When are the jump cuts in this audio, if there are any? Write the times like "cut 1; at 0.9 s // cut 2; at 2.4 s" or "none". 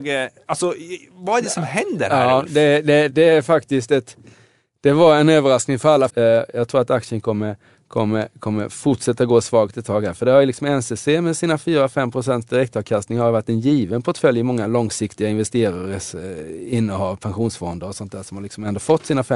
cut 1; at 3.1 s // cut 2; at 6.1 s